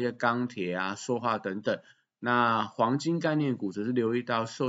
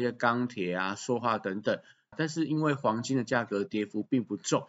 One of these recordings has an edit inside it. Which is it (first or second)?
second